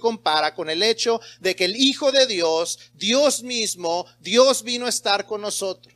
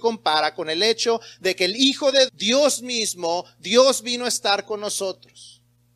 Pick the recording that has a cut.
second; 1 cut; at 2.3 s

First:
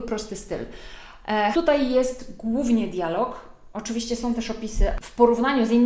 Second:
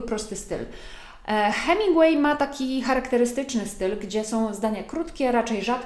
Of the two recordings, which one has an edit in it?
first; 1 cut; at 1.5 s

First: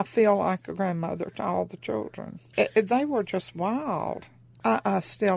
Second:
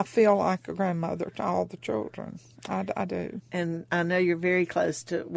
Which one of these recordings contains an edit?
first; 1 cut; at 2.5 s

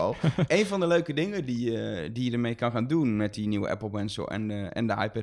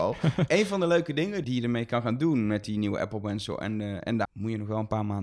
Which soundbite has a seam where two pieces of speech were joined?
second; 2 cuts; at 1.4 s, 4.3 s

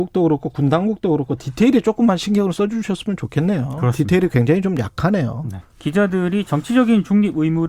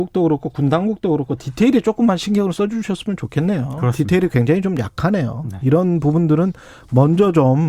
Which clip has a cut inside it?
first; 1 cut; at 5.6 s

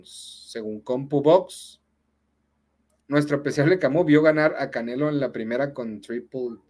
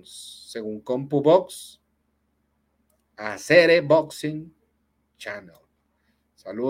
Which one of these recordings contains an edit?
first; 1 cut; at 3.0 s

